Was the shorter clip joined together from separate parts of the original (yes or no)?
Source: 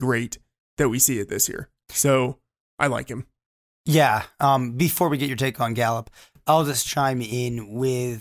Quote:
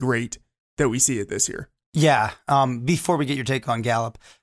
yes